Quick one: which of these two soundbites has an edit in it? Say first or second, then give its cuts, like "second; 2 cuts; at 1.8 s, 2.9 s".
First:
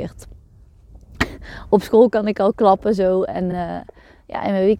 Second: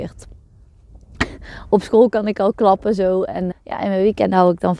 second; 1 cut; at 3.5 s